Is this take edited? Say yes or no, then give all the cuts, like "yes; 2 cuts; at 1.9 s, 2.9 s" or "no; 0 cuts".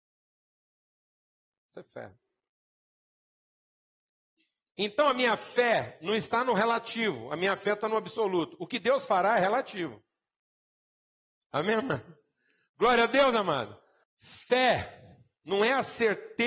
yes; 2 cuts; at 1.5 s, 14.0 s